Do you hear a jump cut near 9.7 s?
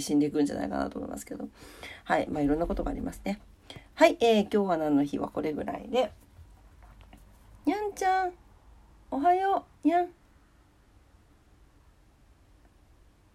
yes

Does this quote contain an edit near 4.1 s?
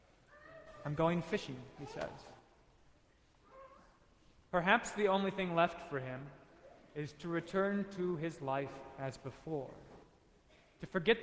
no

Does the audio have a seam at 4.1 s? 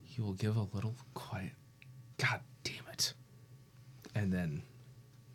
no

